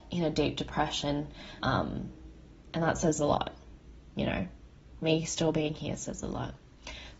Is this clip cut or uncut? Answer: cut